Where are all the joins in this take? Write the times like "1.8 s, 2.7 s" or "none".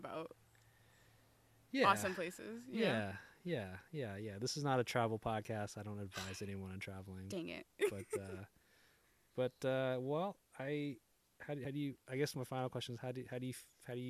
none